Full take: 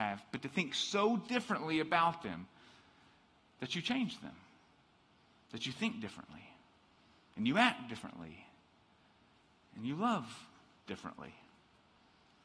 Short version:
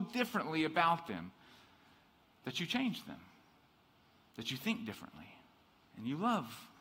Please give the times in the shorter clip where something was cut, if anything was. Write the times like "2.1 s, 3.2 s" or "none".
5.8 s